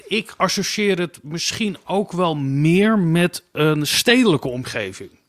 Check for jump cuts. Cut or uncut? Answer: uncut